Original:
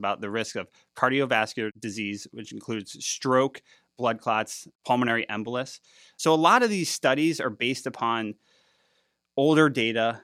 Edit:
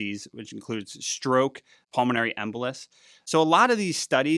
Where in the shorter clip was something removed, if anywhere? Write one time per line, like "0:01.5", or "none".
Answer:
0:01.8